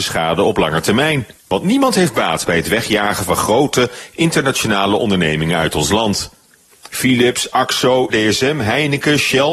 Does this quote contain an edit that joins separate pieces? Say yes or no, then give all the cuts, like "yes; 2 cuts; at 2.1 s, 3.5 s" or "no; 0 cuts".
yes; 3 cuts; at 1.4 s, 6.7 s, 8.1 s